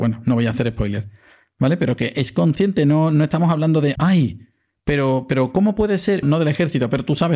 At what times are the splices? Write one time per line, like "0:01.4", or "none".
0:04.0
0:06.2